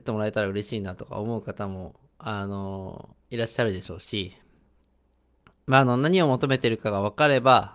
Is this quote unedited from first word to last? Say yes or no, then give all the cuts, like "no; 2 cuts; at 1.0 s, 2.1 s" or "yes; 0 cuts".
no; 1 cut; at 3.2 s